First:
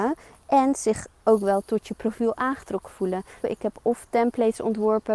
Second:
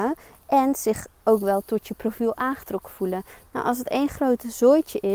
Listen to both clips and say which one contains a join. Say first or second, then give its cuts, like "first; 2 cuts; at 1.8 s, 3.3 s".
first; 1 cut; at 3.4 s